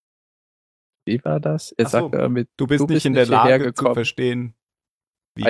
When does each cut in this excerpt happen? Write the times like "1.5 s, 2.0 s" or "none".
none